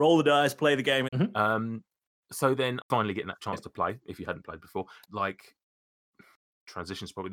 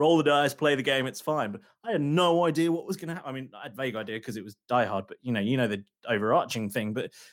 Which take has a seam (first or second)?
first